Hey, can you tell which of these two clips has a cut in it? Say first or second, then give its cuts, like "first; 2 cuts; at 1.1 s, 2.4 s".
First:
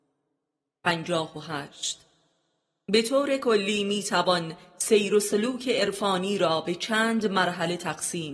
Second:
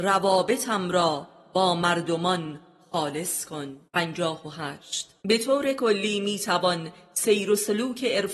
second; 2 cuts; at 3.9 s, 5.2 s